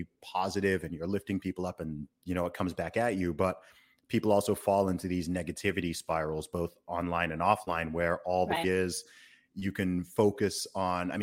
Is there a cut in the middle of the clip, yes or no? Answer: yes